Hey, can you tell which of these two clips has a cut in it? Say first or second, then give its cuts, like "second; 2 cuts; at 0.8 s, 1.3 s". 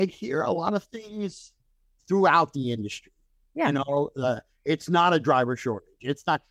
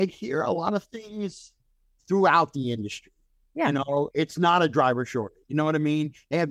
second; 2 cuts; at 4.1 s, 5.4 s